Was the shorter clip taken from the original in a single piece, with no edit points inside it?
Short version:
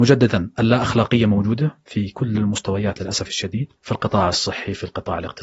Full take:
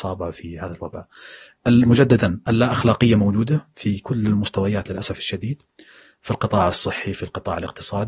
no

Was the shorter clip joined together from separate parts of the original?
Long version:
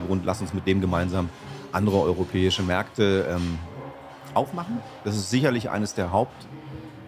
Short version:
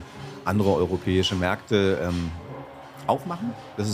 no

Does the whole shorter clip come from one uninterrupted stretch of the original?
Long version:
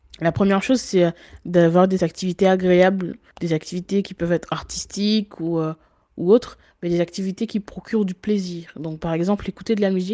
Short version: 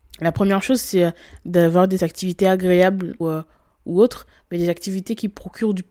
no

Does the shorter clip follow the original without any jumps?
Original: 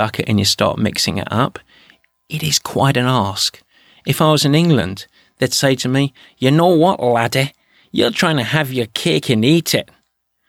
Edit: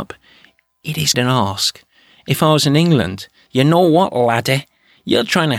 no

